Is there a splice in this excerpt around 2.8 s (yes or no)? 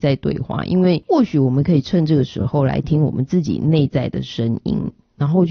yes